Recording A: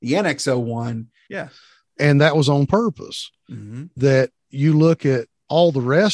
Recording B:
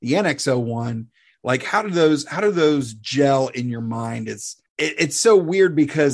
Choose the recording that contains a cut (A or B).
A